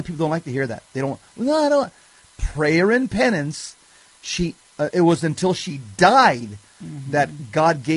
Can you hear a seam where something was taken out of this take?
yes; 1 cut; at 4.9 s

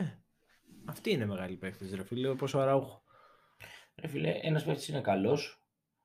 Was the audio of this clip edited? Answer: no; 0 cuts

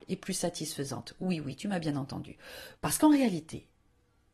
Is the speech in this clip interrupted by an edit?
yes; 1 cut; at 2.7 s

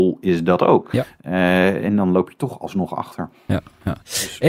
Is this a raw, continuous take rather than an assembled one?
yes; 0 cuts

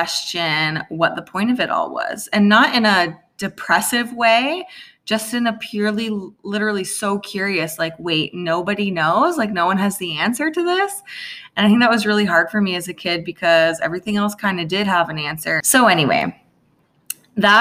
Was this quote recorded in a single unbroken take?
no; 1 cut; at 15.6 s

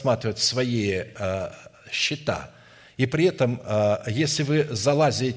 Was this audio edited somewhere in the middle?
no; 0 cuts

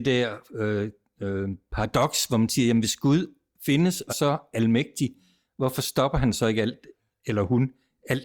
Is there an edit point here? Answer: yes; 1 cut; at 4.1 s

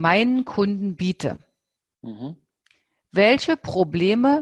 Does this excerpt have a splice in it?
no; 0 cuts

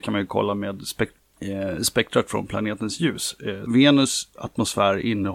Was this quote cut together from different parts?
yes; 1 cut; at 3.7 s

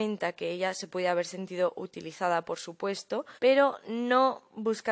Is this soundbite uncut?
no; 1 cut; at 3.4 s

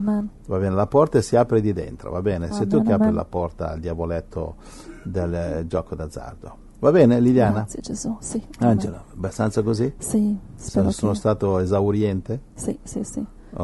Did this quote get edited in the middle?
no; 0 cuts

